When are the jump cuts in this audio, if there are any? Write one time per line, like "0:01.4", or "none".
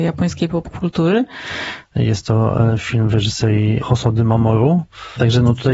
0:01.8